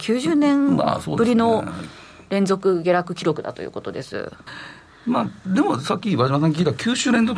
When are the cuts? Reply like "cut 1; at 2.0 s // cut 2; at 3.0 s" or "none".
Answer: cut 1; at 4.5 s